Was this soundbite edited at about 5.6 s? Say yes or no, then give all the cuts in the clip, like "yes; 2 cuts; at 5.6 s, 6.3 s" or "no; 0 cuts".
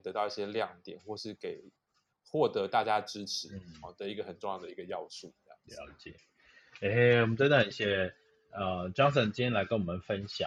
no; 1 cut; at 7.7 s